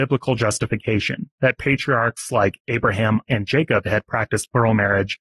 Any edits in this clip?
yes; 1 cut; at 3.3 s

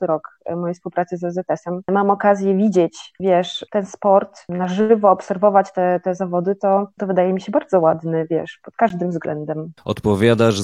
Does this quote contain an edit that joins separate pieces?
no; 0 cuts

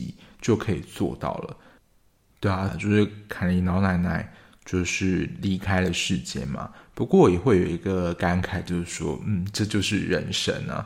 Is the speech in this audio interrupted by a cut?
yes; 1 cut; at 2.7 s

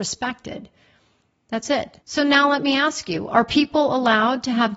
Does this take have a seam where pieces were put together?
yes; 1 cut; at 2.0 s

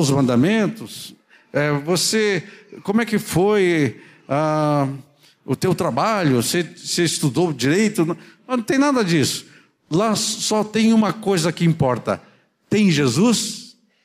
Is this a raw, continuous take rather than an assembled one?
yes; 0 cuts

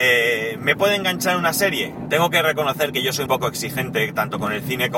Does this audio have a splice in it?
yes; 2 cuts; at 2.1 s, 3.3 s

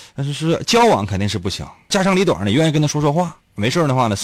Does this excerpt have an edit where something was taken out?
yes; 1 cut; at 1.9 s

